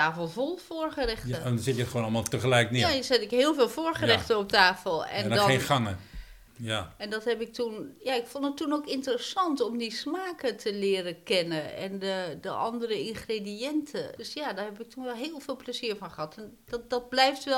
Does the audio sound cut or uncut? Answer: cut